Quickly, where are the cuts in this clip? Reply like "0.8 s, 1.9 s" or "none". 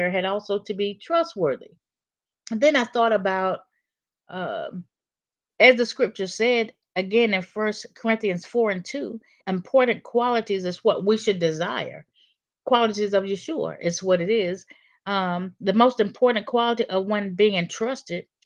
2.3 s, 5.5 s, 9.4 s